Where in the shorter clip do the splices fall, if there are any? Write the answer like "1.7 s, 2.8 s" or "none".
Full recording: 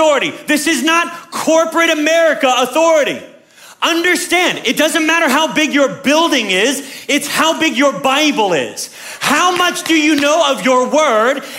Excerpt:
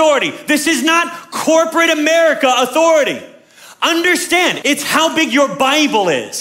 4.6 s

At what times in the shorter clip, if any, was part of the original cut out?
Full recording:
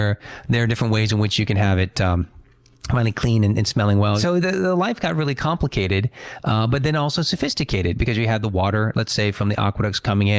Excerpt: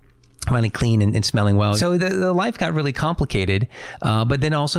none

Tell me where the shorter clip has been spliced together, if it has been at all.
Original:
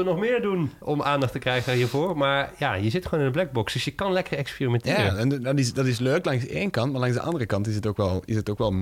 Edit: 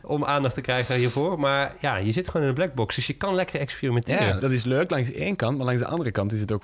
4.4 s

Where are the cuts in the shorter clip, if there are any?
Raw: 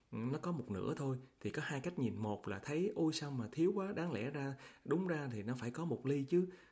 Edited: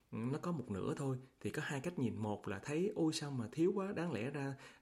none

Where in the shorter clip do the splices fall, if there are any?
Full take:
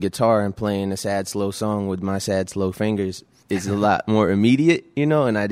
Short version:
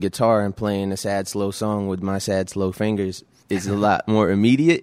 none

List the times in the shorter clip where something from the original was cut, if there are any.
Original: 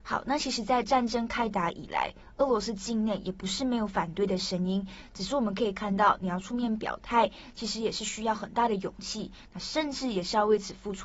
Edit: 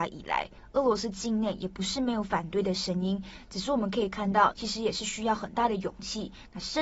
4.5 s

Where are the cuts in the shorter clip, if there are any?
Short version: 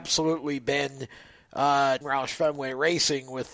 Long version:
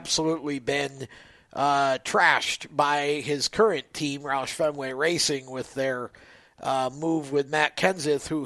2.0 s

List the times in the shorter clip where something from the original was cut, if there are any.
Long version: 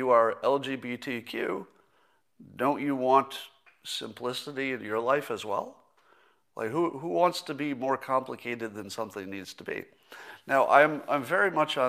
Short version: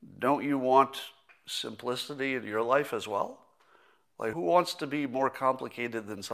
4.3 s

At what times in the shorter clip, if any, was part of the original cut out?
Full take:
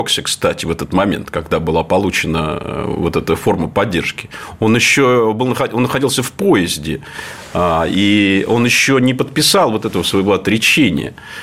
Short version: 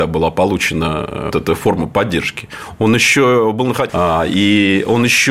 1.3 s, 3.9 s

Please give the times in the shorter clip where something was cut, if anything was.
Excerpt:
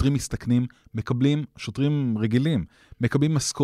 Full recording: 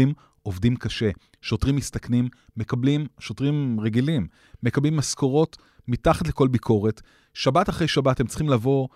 none

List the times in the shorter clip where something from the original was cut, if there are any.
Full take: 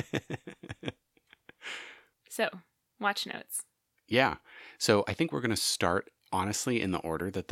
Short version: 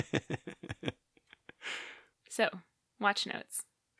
none

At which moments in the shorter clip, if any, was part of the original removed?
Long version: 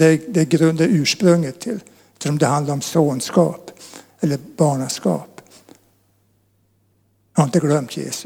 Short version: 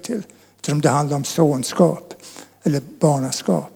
none

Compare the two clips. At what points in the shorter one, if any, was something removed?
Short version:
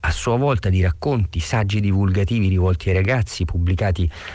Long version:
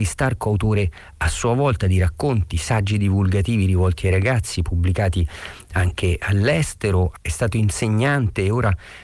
none

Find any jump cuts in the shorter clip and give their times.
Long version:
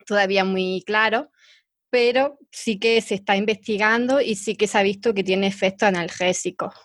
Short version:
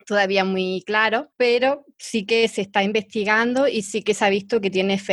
1.3 s

